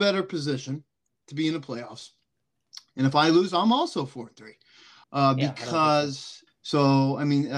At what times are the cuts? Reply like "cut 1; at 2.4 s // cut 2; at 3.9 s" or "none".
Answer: cut 1; at 5.0 s // cut 2; at 6.5 s